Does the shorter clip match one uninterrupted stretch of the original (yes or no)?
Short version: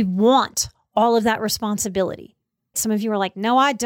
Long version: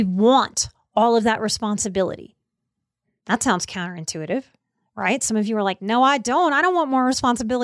no